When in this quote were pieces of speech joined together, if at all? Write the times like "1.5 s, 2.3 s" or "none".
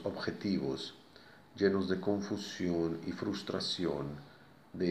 none